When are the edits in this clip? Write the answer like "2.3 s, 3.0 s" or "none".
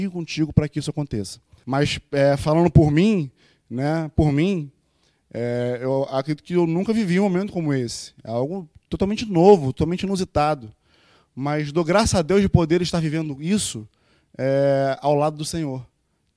1.6 s